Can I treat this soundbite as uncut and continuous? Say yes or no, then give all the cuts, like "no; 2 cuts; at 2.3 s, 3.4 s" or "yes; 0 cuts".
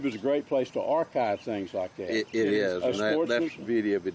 yes; 0 cuts